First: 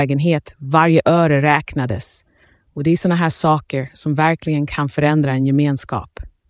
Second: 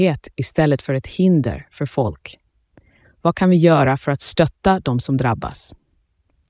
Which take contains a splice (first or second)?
second